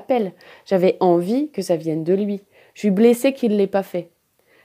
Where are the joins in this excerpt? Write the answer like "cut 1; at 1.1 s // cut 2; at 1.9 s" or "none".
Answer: none